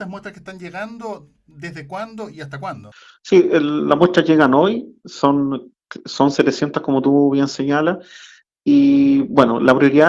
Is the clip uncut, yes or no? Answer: yes